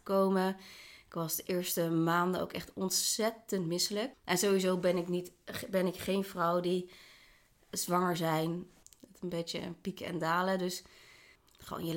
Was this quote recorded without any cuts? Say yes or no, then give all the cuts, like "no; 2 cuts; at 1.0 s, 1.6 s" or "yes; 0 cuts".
no; 2 cuts; at 4.1 s, 8.8 s